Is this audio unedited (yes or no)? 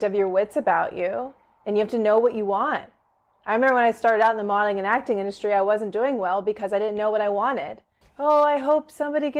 no